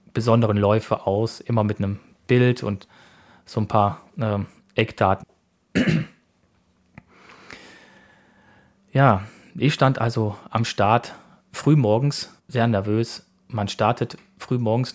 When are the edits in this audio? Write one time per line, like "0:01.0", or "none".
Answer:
0:05.2
0:12.4